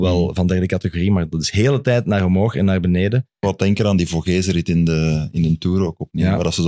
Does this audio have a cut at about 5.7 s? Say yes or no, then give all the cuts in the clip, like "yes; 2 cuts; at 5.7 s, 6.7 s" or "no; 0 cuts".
no; 1 cut; at 3.4 s